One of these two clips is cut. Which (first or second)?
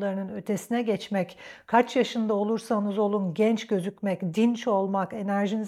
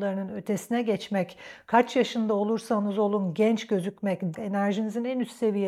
second